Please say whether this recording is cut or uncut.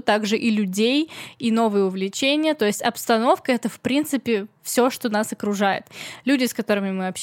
uncut